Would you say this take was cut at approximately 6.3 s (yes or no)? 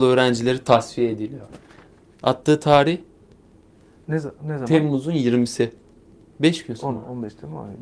yes